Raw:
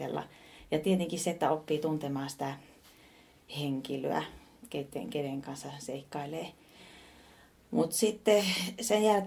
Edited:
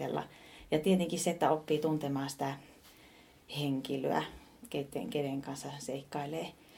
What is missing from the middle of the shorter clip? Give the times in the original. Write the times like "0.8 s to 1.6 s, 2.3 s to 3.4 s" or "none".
none

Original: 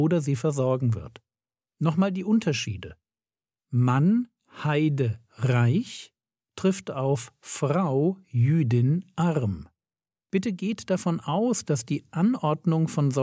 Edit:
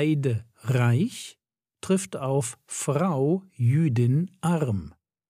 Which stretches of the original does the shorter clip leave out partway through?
none

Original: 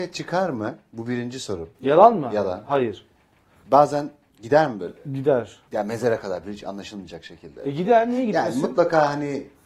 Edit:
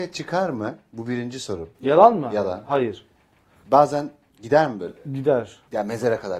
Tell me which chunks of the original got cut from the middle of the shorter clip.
none

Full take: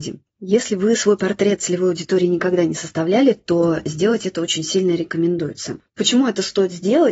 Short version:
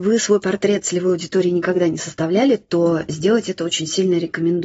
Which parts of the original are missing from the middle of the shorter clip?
none

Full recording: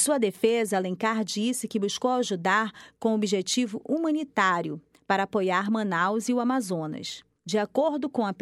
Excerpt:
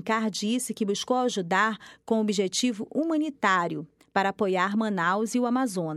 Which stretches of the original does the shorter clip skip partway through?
none

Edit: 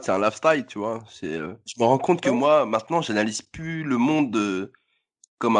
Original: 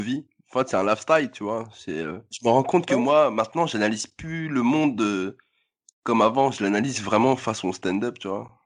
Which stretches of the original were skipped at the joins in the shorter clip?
none

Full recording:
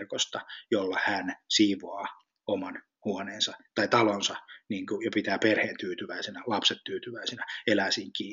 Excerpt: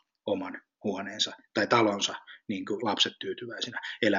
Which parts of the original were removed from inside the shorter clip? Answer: 5.0 s to 6.4 s

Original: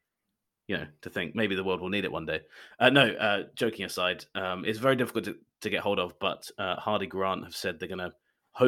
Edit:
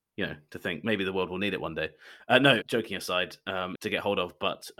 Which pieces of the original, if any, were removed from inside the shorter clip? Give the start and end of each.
3.1 s to 3.5 s, 4.6 s to 5.6 s

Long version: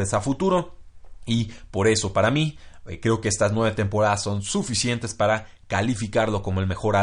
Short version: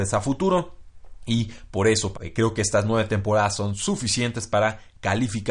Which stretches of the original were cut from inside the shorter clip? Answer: 2.1 s to 2.8 s

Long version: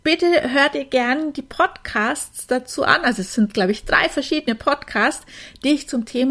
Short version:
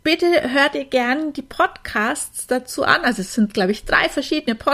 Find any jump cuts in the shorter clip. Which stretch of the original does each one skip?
none

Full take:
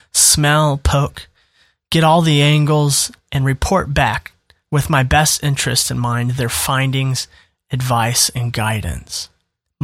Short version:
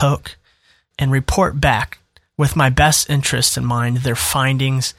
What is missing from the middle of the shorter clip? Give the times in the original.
1.8 s to 3.2 s

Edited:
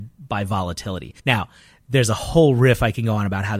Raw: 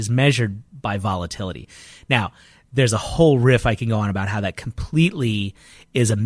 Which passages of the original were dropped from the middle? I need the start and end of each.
1.7 s to 2.0 s

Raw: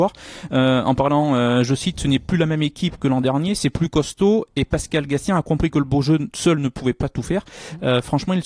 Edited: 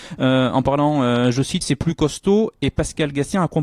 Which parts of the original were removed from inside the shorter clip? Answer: 1.9 s to 3.6 s

